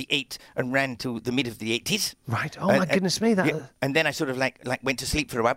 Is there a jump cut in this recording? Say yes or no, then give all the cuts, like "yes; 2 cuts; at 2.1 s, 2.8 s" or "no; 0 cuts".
no; 0 cuts